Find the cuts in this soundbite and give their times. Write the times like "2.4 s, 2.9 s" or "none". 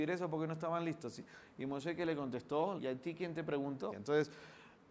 2.8 s, 3.9 s